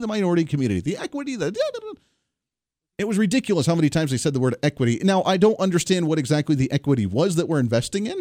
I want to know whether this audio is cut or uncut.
uncut